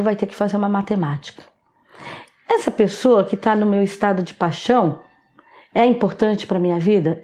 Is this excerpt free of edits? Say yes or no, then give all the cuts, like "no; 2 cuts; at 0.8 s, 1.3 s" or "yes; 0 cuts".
yes; 0 cuts